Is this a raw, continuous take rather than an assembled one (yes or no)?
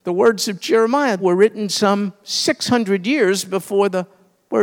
no